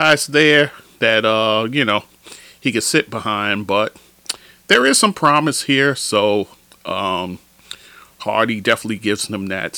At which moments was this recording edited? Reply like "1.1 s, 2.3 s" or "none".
none